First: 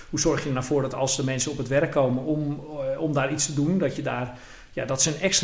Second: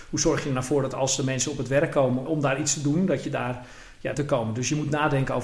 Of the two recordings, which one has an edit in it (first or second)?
second